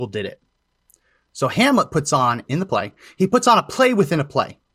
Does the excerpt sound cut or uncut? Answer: cut